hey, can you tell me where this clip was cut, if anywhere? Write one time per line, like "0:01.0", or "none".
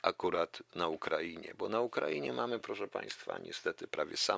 none